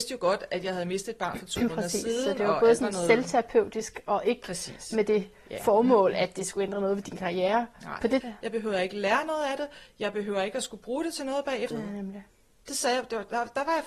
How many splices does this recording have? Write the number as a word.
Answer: two